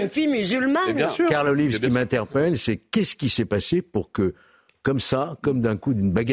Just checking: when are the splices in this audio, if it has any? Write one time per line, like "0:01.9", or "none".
none